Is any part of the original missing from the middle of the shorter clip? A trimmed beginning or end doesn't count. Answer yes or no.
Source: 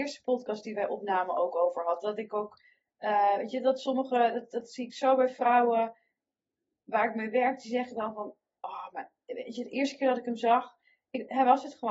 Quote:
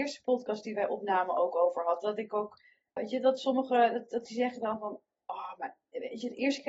yes